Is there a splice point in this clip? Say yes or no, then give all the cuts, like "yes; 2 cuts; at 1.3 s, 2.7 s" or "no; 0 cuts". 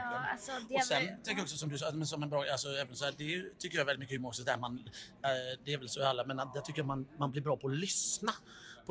no; 0 cuts